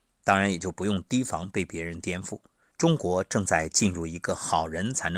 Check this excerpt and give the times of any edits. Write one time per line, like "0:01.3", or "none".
0:02.7